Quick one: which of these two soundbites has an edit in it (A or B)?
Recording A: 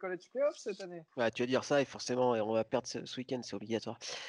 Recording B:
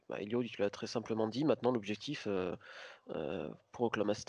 A